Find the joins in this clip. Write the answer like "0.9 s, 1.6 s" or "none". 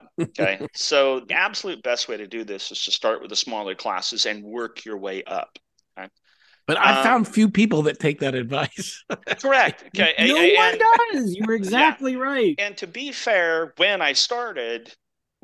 none

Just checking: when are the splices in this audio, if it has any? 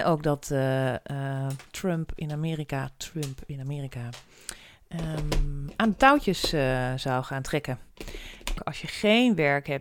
8.6 s

